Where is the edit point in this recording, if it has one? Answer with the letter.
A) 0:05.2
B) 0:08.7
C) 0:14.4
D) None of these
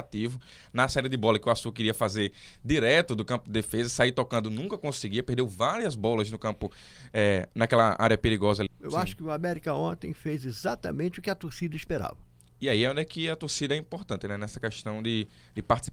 B